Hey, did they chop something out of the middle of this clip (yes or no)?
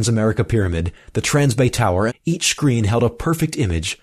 yes